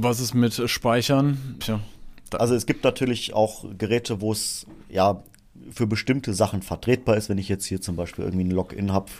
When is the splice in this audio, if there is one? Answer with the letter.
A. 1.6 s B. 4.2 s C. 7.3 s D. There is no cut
A